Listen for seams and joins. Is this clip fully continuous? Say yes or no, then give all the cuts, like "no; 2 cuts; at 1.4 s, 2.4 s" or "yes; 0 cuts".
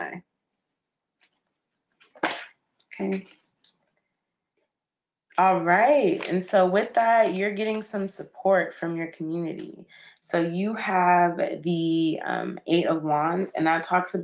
yes; 0 cuts